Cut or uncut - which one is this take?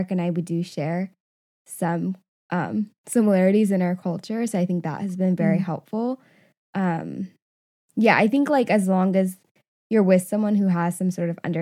uncut